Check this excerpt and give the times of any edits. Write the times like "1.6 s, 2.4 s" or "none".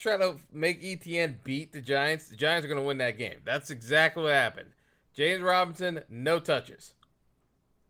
none

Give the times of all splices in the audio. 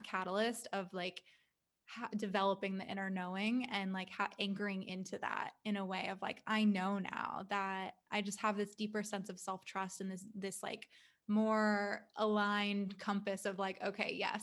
none

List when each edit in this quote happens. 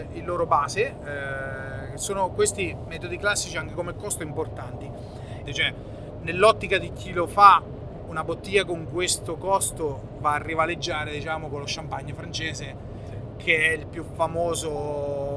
5.5 s, 8.1 s

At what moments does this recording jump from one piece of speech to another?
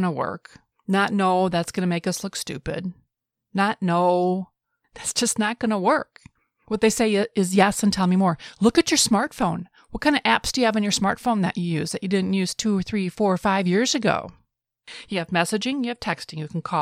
none

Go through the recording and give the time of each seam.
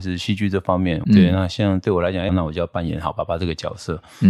1.0 s, 2.3 s

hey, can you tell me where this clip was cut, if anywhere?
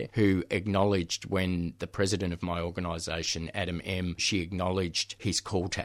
4.2 s

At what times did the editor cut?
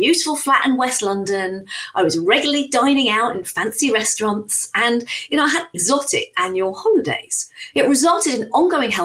5.7 s, 7.7 s

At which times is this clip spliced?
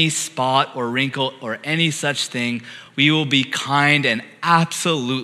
none

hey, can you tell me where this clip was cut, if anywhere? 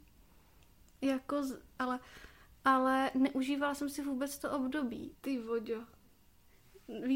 1.8 s, 5.1 s

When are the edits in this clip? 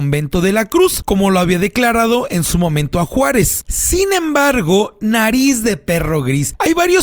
3.6 s

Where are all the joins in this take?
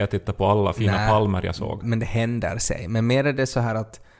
1.8 s

